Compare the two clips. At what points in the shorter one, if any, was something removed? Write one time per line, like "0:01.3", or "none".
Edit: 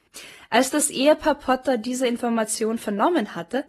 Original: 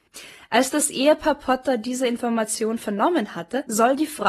none